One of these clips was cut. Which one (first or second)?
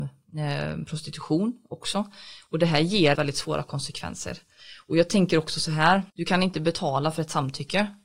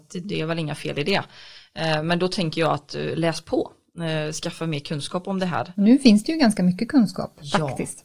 first